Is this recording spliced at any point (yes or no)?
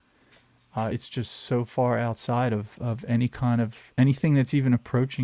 no